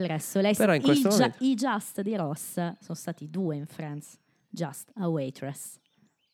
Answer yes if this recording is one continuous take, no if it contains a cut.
yes